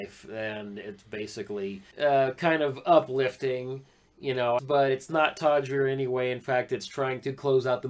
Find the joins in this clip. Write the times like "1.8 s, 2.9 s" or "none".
1.9 s, 4.6 s